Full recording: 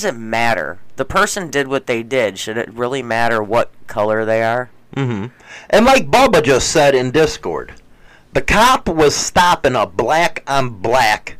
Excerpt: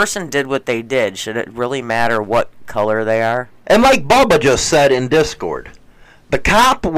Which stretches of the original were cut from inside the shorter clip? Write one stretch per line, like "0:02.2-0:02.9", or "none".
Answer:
0:04.8-0:05.7

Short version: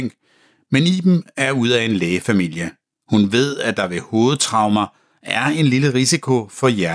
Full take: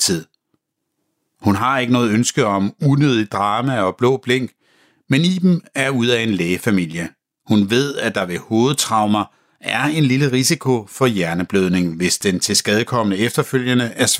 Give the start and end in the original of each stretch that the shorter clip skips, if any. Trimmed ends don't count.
none

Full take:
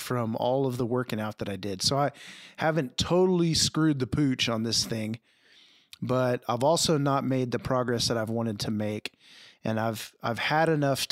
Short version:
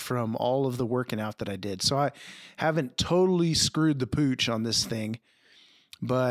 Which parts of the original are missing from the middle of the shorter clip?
none

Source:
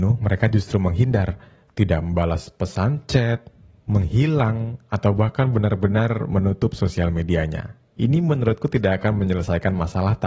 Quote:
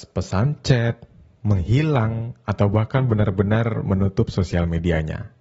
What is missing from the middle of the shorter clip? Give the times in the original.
none

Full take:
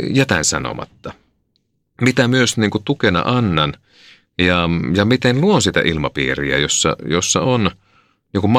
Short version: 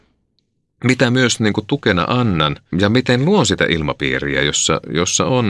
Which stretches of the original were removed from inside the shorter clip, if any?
0:03.9-0:04.9

